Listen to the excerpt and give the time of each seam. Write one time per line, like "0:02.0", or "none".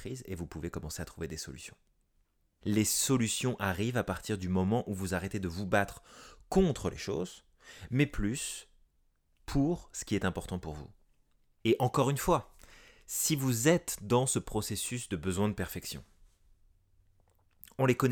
0:02.6
0:11.6